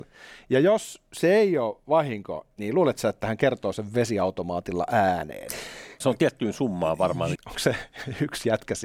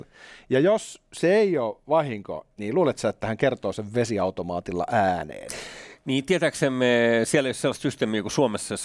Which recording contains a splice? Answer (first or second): first